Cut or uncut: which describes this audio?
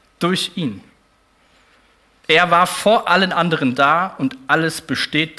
cut